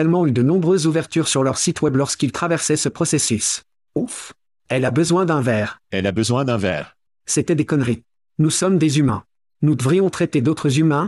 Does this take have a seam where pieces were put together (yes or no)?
yes